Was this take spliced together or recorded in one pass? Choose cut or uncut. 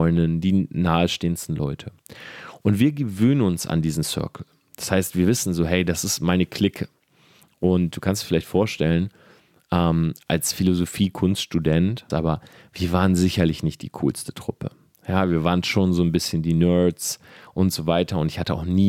cut